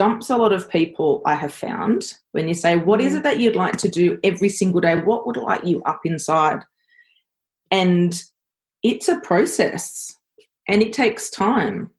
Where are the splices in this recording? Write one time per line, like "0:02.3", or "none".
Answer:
none